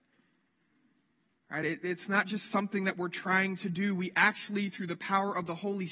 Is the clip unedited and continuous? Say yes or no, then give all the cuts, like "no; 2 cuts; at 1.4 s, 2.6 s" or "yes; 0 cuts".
yes; 0 cuts